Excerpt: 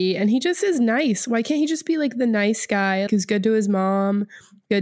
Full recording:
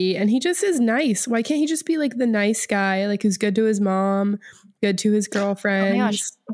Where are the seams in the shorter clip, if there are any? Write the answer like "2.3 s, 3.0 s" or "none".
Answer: 3.1 s